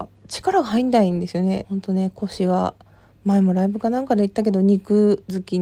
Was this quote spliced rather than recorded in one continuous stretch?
yes; 1 cut; at 1.6 s

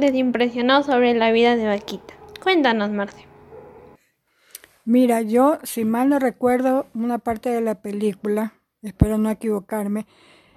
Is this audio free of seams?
yes; 0 cuts

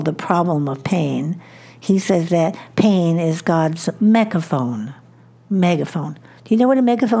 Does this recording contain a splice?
no; 0 cuts

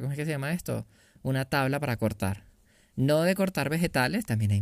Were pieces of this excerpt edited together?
no; 0 cuts

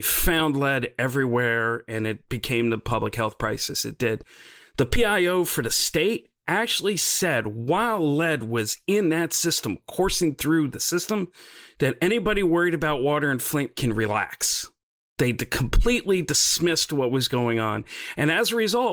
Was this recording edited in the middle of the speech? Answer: no; 0 cuts

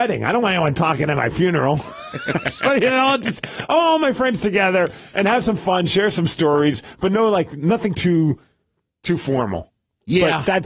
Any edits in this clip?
no; 0 cuts

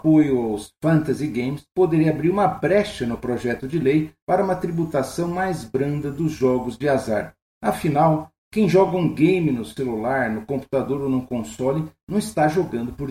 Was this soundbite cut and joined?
no; 0 cuts

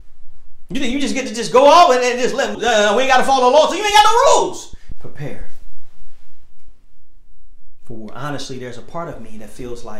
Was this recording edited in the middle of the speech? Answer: yes; 2 cuts; at 2.5 s, 4.9 s

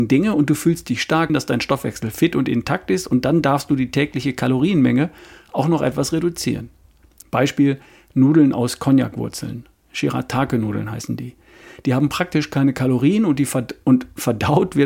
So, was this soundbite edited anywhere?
yes; 2 cuts; at 1.3 s, 7.2 s

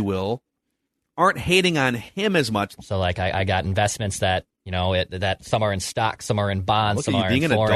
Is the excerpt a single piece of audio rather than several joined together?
no; 1 cut; at 2.8 s

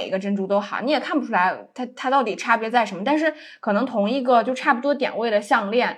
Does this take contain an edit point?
no; 0 cuts

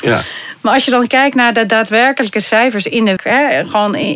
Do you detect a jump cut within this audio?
yes; 1 cut; at 3.2 s

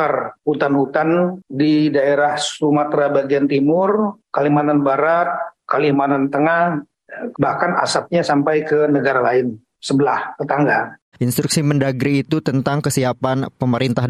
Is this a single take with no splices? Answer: no; 2 cuts; at 7.3 s, 11.1 s

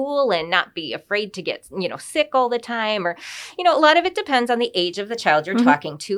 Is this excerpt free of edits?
yes; 0 cuts

